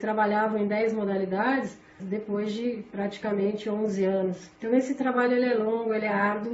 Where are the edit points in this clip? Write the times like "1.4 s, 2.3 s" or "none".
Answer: 2.0 s, 4.6 s